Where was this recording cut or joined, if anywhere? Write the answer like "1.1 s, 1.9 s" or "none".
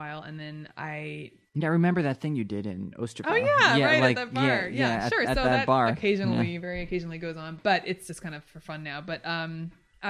none